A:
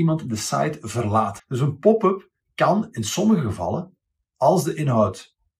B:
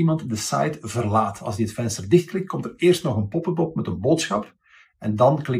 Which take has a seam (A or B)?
A